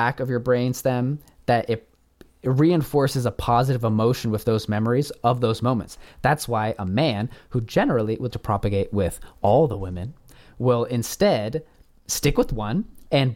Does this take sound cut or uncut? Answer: cut